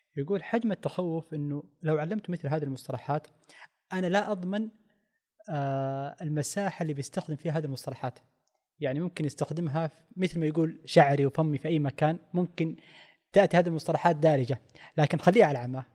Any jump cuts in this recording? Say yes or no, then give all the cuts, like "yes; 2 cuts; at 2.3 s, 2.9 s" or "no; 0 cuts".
no; 0 cuts